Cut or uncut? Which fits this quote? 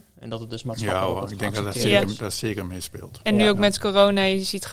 uncut